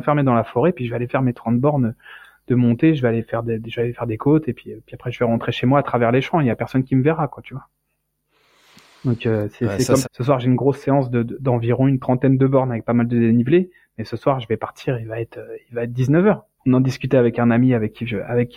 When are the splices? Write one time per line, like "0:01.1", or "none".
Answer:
0:10.0
0:16.6